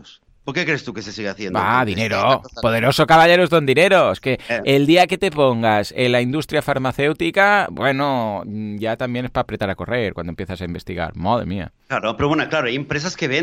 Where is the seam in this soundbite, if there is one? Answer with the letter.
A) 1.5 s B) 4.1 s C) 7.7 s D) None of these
B